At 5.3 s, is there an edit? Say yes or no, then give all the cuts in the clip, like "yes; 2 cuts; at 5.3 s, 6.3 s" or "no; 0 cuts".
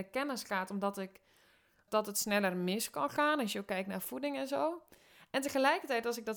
no; 1 cut; at 1.9 s